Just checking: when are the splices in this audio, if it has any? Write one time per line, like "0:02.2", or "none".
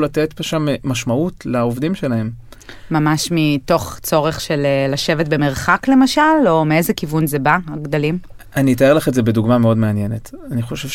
none